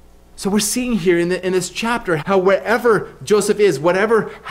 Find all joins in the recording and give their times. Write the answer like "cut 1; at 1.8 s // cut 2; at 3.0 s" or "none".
cut 1; at 2.2 s